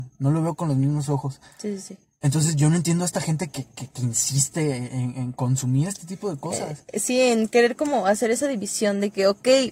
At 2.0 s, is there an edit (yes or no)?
no